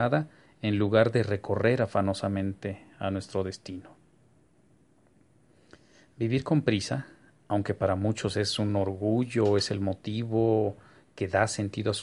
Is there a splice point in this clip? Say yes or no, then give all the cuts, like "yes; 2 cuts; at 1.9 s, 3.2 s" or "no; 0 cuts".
no; 0 cuts